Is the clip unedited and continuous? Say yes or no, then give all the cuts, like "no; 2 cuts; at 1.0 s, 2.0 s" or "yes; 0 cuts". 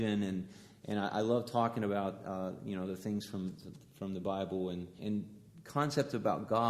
no; 1 cut; at 5.0 s